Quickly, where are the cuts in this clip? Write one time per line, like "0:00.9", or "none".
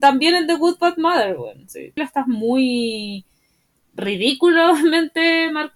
0:02.0